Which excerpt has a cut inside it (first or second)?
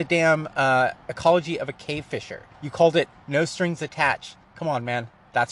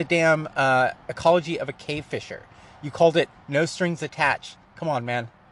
first